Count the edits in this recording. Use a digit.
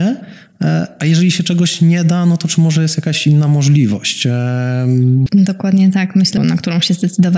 2